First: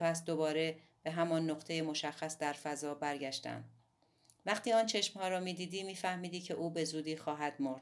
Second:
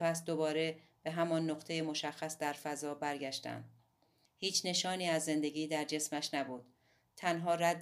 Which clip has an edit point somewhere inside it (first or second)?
second